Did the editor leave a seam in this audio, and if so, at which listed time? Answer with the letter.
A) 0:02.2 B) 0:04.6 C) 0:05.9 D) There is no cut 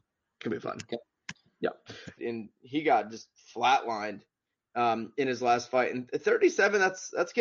A